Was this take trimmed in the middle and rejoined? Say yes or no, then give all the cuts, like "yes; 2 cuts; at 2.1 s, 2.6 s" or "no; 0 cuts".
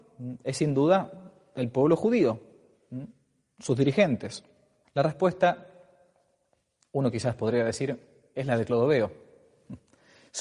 yes; 1 cut; at 4.8 s